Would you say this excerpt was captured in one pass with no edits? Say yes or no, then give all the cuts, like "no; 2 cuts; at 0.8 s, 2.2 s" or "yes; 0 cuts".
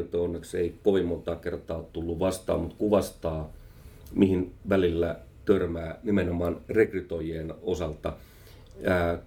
yes; 0 cuts